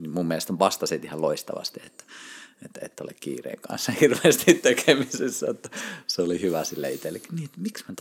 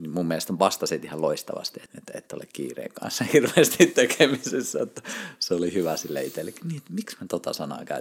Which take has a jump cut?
second; 1 cut; at 1.9 s

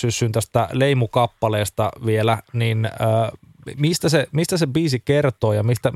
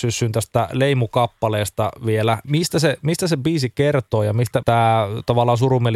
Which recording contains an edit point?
second; 2 cuts; at 2.4 s, 4.6 s

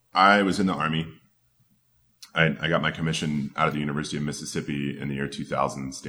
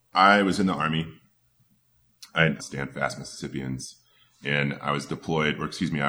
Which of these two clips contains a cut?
second; 1 cut; at 2.6 s

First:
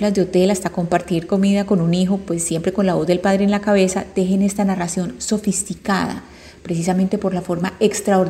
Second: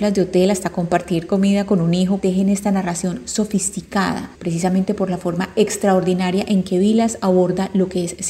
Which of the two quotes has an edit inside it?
second; 2 cuts; at 2.2 s, 4.3 s

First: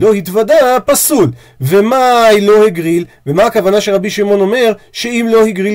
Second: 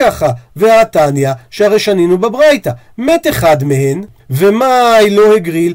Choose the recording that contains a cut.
second; 1 cut; at 4.2 s

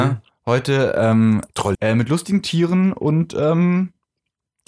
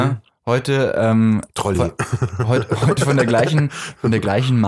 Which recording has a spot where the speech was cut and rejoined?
first; 1 cut; at 1.7 s

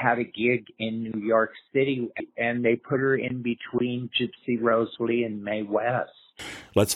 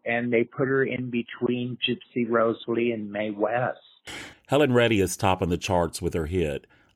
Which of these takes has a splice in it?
second; 1 cut; at 4.3 s

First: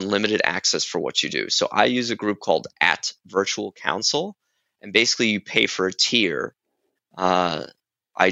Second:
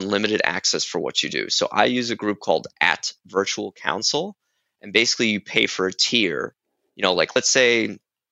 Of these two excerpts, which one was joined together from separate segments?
first; 1 cut; at 7.0 s

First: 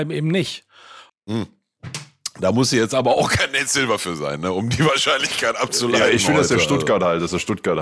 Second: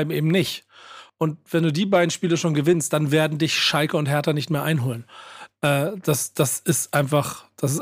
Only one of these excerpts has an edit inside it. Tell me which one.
first; 1 cut; at 1.1 s

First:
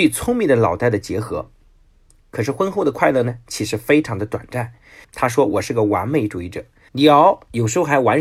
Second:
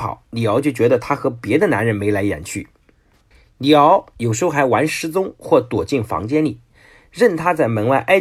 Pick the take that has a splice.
first; 2 cuts; at 5.0 s, 6.9 s

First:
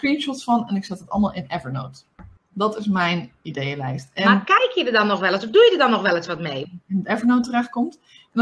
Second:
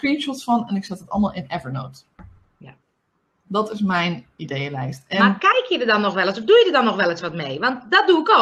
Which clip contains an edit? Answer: first; 2 cuts; at 2.4 s, 6.6 s

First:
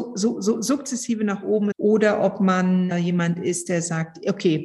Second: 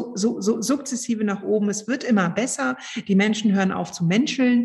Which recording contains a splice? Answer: first; 2 cuts; at 1.7 s, 2.9 s

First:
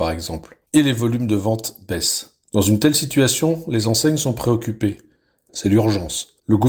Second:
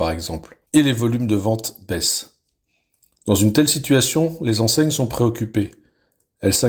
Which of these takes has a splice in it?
first; 2 cuts; at 2.4 s, 5.5 s

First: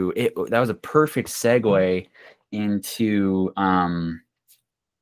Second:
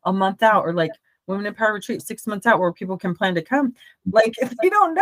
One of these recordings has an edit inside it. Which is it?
second; 2 cuts; at 2.0 s, 4.0 s

